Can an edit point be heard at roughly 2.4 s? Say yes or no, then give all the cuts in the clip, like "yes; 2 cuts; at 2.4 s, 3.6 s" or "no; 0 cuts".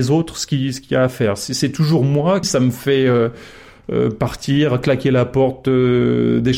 yes; 1 cut; at 2.4 s